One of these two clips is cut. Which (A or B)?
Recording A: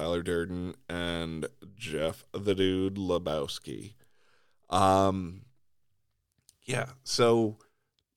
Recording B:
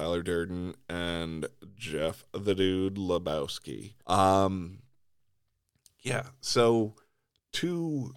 B